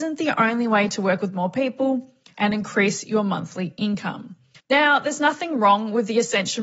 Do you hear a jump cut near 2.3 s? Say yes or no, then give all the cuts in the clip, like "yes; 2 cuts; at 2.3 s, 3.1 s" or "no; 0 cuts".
yes; 2 cuts; at 2.3 s, 4.6 s